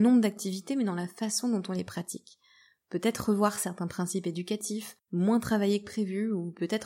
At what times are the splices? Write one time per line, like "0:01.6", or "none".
none